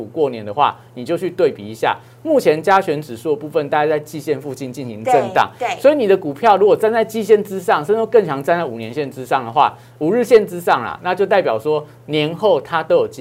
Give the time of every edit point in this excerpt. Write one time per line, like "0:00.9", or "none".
none